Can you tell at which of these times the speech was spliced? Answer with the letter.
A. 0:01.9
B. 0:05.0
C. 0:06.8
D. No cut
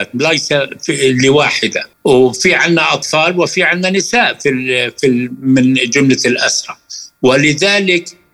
A